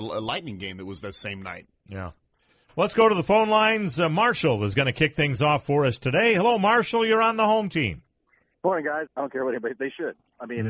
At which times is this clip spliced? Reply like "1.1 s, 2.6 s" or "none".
1.8 s, 9.1 s